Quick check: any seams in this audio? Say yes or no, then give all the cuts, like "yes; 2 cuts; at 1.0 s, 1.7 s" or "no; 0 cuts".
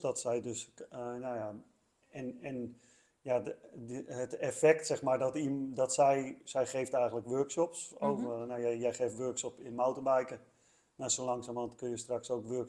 no; 0 cuts